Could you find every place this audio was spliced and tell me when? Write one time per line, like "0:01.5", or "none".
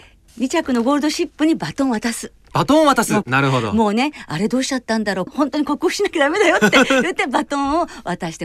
0:03.2
0:05.3